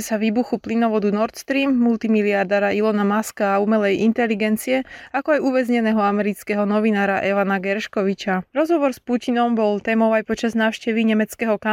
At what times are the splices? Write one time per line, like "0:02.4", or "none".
none